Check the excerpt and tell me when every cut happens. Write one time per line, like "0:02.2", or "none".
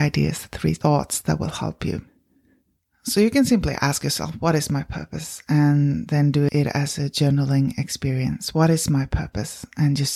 none